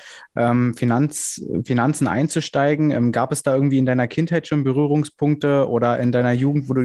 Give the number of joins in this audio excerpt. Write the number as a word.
zero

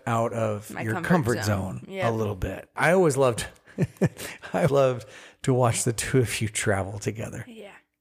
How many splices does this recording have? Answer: two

